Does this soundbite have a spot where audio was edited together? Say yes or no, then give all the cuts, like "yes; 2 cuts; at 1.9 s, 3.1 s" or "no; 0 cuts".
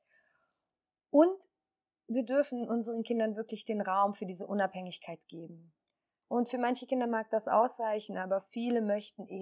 yes; 1 cut; at 6.2 s